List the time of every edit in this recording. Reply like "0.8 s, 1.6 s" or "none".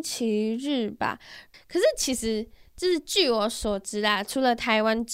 1.5 s